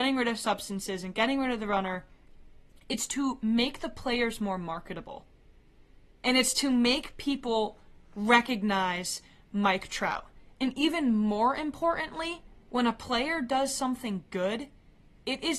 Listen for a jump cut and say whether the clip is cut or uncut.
uncut